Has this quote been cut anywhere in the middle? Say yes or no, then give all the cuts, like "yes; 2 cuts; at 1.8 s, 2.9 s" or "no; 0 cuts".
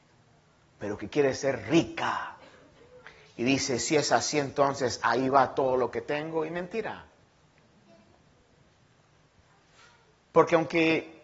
no; 0 cuts